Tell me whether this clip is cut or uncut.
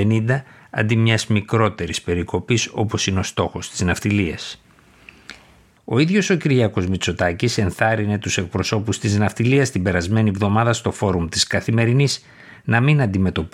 cut